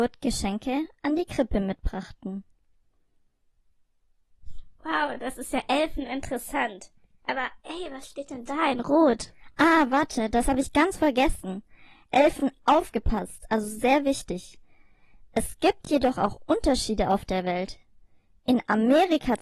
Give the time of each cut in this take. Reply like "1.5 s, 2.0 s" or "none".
none